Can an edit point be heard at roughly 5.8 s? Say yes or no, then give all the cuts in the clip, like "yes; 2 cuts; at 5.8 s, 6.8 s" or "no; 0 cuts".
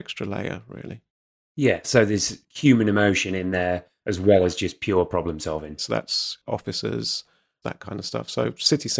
yes; 2 cuts; at 5.8 s, 7.6 s